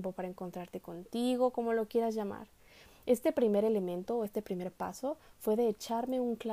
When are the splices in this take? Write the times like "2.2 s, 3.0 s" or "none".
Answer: none